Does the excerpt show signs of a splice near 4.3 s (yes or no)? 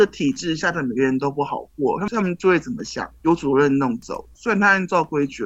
yes